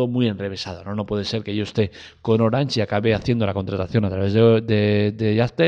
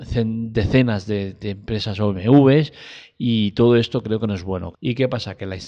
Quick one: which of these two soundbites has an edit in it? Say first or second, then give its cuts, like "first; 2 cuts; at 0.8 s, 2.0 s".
second; 2 cuts; at 1.4 s, 4.7 s